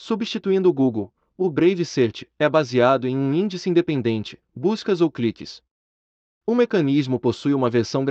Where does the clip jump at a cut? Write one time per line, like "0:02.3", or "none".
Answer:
0:04.4